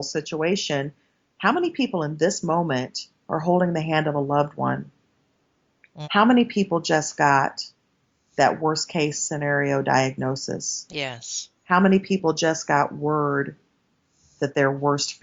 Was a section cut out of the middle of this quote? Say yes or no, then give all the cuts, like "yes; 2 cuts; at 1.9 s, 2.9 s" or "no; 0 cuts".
yes; 2 cuts; at 6.0 s, 11.6 s